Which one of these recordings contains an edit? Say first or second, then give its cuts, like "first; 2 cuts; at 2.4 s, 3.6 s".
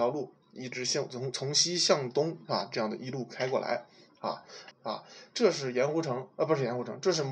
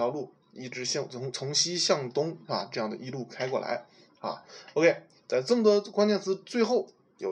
first; 1 cut; at 4.7 s